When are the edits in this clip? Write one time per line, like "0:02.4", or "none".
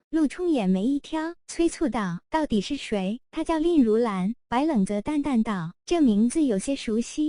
none